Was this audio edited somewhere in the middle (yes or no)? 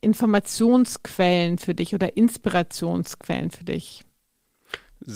no